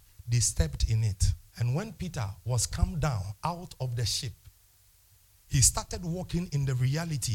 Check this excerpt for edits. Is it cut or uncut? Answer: cut